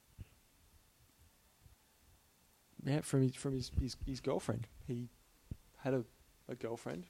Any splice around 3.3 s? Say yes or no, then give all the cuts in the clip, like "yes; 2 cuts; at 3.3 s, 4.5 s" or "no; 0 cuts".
no; 0 cuts